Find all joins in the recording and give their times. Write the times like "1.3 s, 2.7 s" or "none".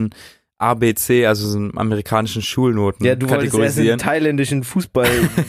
none